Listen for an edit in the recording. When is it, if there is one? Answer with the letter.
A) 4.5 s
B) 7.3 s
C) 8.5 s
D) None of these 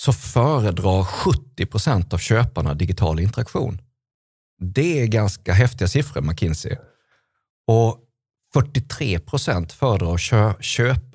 D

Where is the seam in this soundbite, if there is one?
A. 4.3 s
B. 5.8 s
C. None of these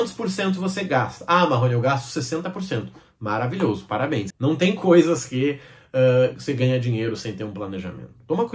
A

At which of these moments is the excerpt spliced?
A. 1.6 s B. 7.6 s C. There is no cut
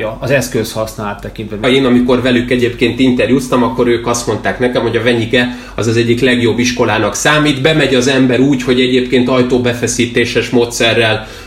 A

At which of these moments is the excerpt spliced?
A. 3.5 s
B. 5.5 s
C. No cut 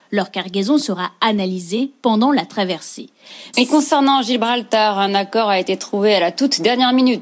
A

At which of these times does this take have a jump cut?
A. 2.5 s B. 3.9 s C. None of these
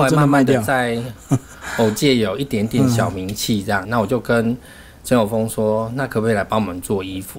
B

